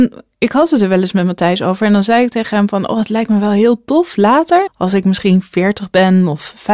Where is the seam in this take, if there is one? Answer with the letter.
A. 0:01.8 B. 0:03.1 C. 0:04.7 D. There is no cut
C